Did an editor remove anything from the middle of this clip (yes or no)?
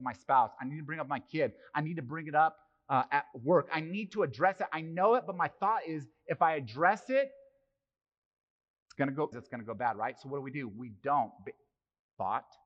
yes